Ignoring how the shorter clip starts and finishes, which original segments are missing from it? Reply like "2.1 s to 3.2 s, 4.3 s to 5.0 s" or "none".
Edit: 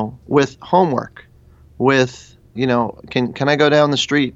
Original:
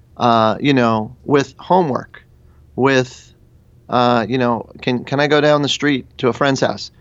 3.5 s to 4.3 s